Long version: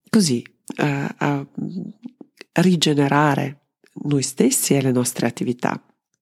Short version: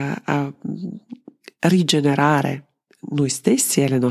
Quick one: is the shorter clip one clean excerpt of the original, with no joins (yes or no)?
yes